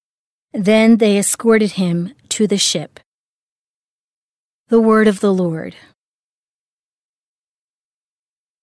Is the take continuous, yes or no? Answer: yes